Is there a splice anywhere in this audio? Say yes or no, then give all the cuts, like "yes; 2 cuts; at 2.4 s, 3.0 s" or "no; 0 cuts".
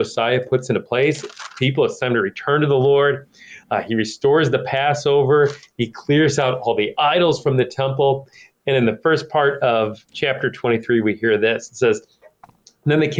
no; 0 cuts